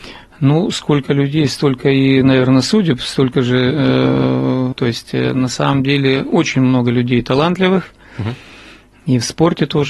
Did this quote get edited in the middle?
yes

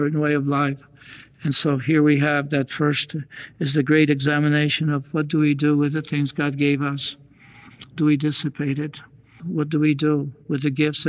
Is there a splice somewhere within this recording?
yes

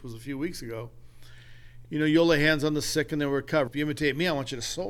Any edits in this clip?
yes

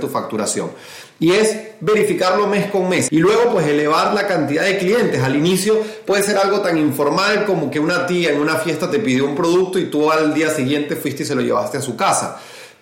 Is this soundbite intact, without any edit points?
no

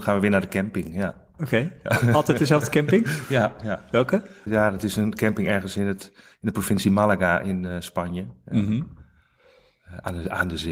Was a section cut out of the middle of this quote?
no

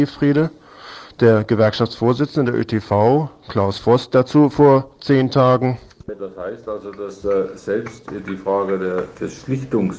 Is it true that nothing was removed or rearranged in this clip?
yes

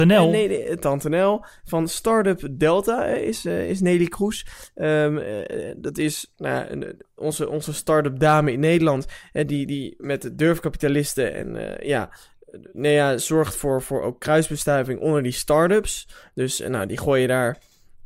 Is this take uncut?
yes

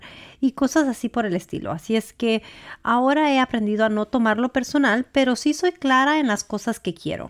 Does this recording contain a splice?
no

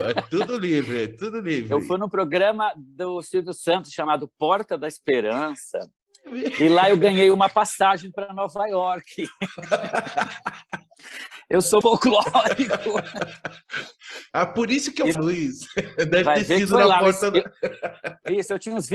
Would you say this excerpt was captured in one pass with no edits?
no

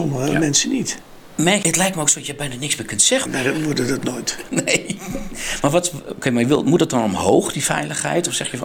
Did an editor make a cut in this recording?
yes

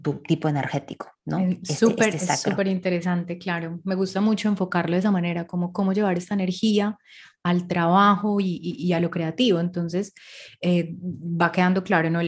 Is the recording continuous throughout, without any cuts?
yes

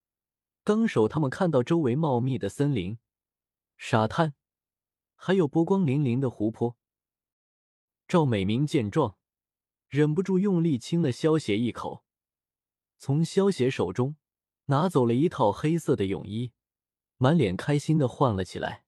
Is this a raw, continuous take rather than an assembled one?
no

